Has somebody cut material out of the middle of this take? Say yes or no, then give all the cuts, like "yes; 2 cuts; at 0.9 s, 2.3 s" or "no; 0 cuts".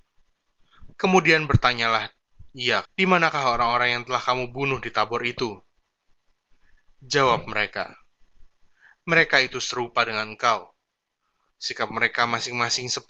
yes; 2 cuts; at 0.9 s, 2.8 s